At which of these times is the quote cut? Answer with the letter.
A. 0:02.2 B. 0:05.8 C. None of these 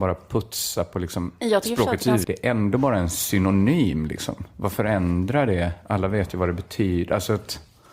A